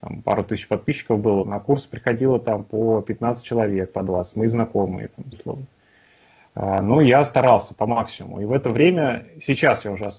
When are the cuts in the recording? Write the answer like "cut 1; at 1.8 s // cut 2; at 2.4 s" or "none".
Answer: cut 1; at 1.4 s // cut 2; at 5.3 s